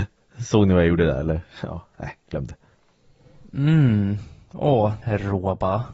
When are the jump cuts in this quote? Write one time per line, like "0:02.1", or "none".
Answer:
0:05.0